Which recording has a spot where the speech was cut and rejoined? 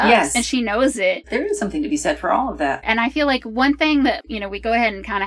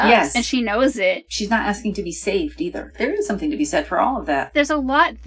first; 2 cuts; at 1.2 s, 2.8 s

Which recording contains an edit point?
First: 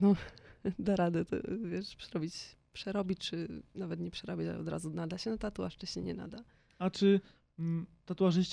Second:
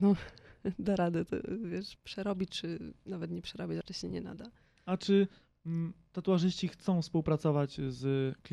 second; 2 cuts; at 2.0 s, 3.8 s

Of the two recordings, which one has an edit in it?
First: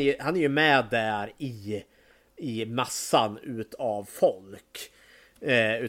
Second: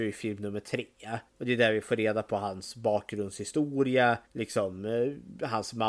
second; 2 cuts; at 1.3 s, 4.2 s

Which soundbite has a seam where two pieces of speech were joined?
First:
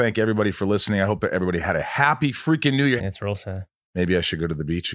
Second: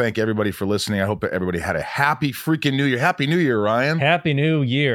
first; 1 cut; at 3.0 s

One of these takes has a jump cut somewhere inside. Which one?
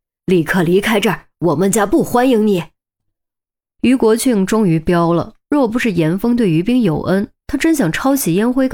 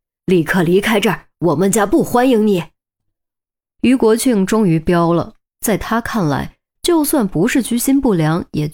second; 2 cuts; at 5.5 s, 6.8 s

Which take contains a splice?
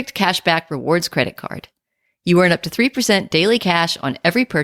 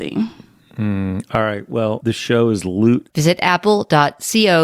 second; 2 cuts; at 2.0 s, 3.1 s

